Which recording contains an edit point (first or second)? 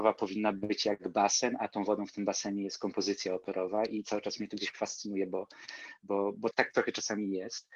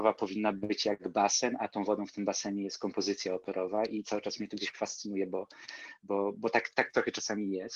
first